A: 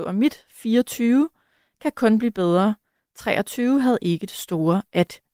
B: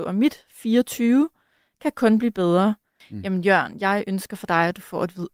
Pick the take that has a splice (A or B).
B